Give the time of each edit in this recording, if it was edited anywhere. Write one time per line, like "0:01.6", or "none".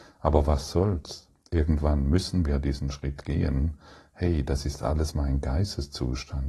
none